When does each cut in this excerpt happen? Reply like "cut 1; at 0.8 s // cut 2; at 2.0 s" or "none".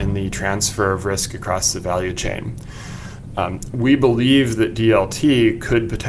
none